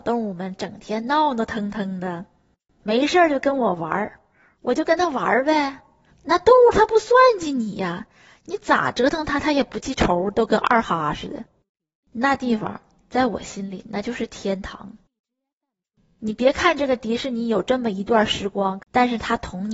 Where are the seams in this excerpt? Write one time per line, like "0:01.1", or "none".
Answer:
0:06.1
0:18.8

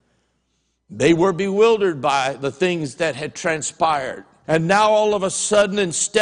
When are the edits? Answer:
0:04.4

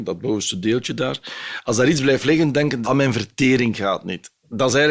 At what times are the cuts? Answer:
0:02.8

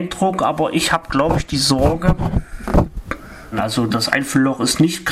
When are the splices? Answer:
0:03.5

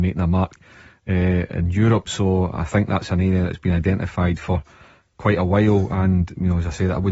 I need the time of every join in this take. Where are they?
none

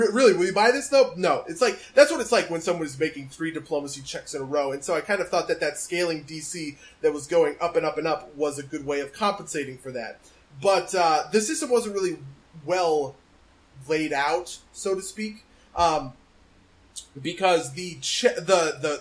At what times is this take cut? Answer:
none

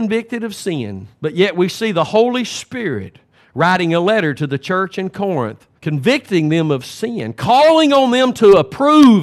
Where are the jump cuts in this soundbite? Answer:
0:01.1
0:05.8

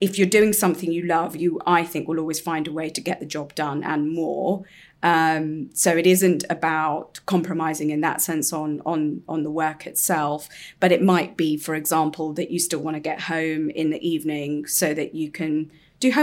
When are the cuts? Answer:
none

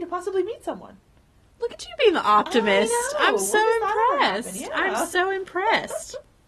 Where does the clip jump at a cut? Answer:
none

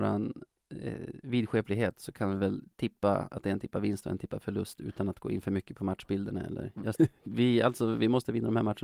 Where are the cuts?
0:06.9

